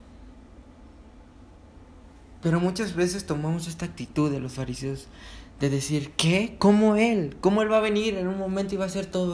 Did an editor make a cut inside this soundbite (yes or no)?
no